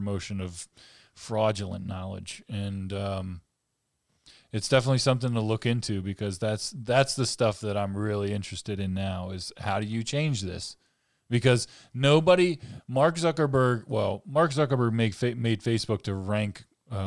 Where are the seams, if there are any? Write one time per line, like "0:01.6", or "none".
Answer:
none